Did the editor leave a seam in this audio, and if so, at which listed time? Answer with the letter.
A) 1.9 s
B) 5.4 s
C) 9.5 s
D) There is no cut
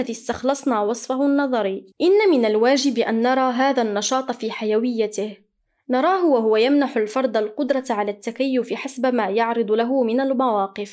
A